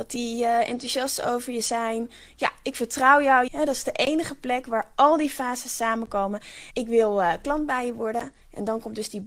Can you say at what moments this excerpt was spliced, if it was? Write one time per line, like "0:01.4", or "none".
0:03.5
0:06.7